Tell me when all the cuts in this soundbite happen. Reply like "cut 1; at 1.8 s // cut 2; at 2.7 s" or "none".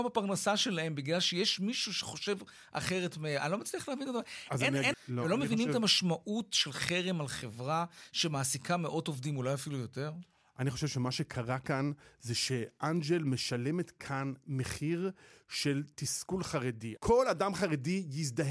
cut 1; at 4.9 s // cut 2; at 17.0 s